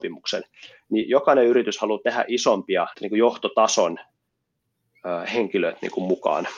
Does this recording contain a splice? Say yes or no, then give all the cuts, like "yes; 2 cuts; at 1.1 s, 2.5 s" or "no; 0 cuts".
yes; 1 cut; at 2.9 s